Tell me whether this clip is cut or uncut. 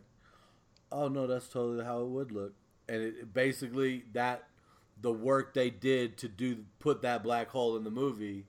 uncut